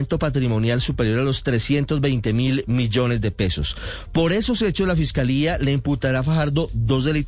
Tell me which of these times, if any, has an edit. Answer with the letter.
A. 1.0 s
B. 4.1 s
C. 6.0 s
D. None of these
D